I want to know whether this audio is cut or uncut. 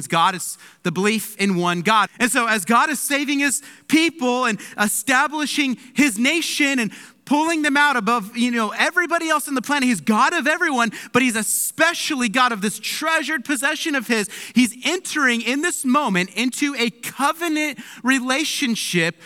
cut